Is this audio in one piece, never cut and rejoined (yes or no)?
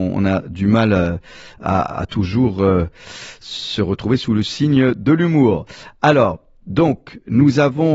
yes